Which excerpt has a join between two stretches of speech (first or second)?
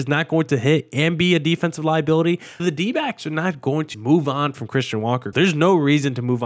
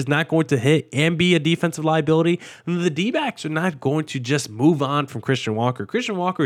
first